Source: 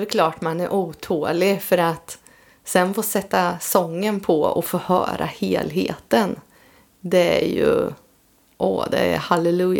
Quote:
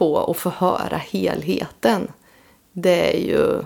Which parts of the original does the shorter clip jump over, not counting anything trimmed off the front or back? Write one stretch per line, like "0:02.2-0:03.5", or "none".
none

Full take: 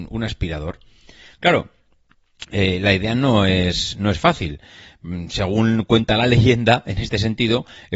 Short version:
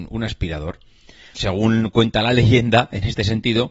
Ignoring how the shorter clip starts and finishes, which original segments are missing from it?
0:01.3-0:05.3

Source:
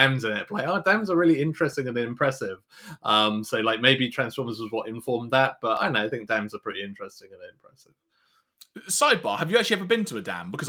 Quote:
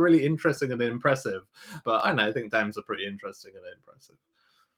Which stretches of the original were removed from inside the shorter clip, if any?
0:03.0-0:05.6

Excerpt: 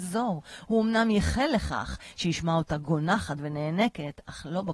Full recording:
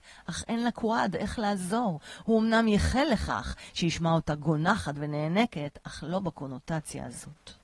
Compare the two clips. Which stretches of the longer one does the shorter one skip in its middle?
none

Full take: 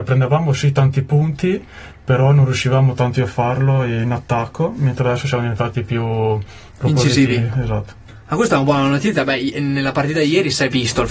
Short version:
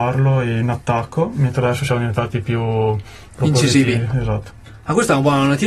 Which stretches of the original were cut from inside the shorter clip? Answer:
none

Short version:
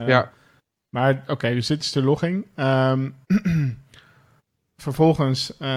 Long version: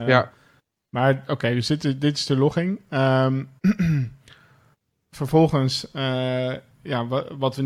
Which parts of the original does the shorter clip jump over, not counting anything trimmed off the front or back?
0:01.8-0:02.1

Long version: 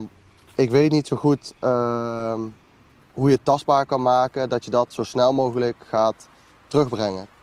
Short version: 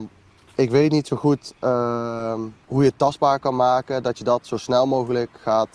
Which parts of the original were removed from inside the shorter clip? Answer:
0:02.6-0:03.1

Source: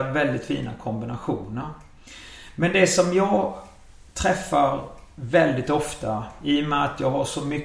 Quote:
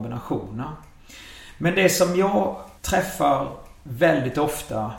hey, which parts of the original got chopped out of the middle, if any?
0:03.7-0:04.1

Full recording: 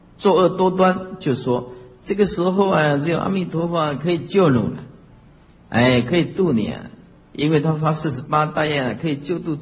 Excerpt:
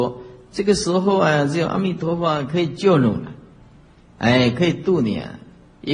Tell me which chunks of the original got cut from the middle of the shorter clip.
none

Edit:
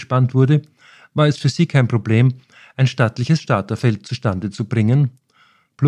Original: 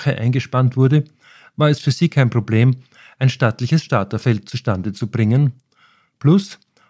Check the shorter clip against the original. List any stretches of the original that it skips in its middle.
none

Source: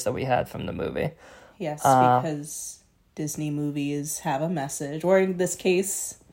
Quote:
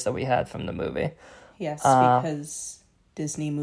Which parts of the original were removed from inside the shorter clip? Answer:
none

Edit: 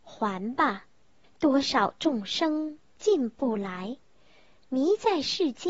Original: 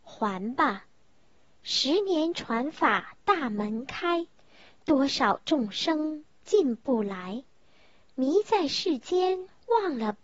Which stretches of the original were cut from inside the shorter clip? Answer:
0:01.2-0:04.7

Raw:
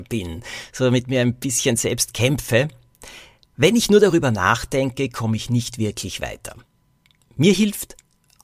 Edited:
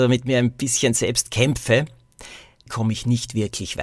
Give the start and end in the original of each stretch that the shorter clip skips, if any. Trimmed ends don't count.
0:03.5-0:05.1

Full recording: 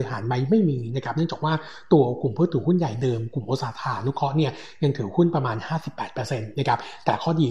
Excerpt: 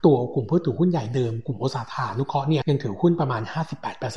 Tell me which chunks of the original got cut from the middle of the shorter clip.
0:04.5-0:04.8

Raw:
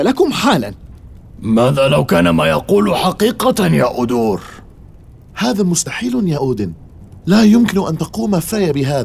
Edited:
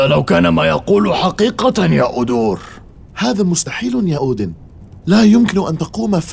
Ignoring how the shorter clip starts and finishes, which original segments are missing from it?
0:04.9-0:05.3

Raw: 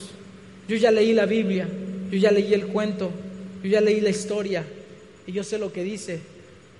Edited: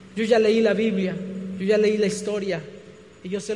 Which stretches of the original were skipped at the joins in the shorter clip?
0:02.1-0:03.6

